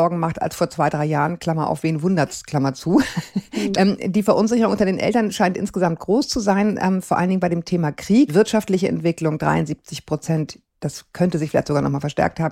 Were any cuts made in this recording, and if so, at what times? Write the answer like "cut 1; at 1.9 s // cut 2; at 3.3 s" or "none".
cut 1; at 3.7 s // cut 2; at 8.3 s